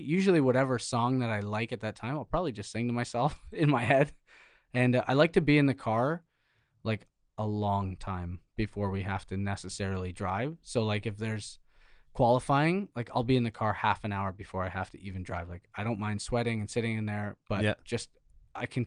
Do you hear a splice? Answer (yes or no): no